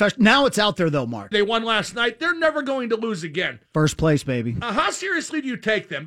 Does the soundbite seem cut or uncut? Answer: cut